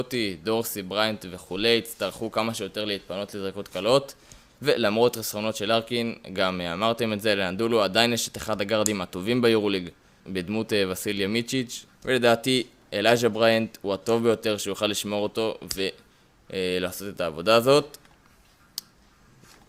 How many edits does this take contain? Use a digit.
2